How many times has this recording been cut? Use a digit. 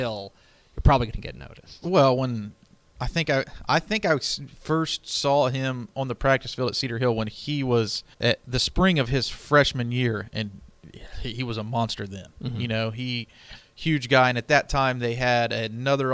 1